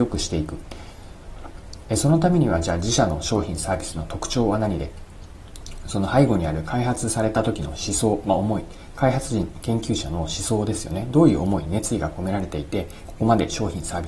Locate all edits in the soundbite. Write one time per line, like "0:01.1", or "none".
none